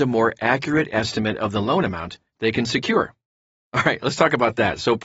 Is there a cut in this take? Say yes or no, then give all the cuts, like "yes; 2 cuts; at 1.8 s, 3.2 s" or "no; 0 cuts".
yes; 1 cut; at 3.7 s